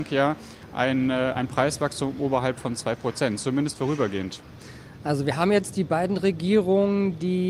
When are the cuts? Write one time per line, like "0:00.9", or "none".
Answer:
none